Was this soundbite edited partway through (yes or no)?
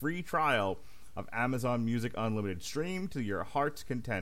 no